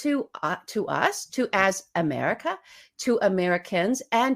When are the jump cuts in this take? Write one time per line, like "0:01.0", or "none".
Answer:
none